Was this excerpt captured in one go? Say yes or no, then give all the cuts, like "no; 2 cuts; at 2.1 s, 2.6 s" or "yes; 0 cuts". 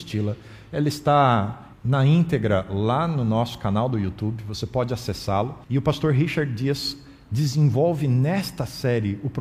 no; 2 cuts; at 1.7 s, 5.6 s